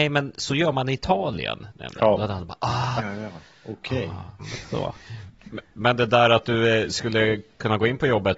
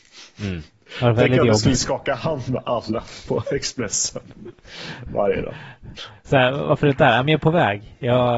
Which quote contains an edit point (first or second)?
first